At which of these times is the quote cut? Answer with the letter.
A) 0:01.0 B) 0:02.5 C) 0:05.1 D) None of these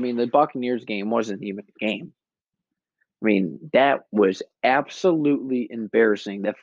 D